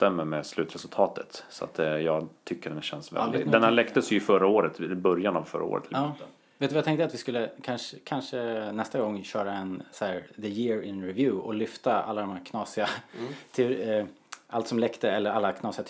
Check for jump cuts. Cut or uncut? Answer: uncut